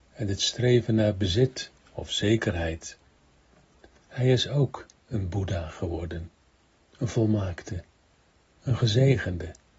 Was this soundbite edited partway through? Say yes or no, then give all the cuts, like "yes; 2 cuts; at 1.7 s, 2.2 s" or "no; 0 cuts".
yes; 1 cut; at 4.0 s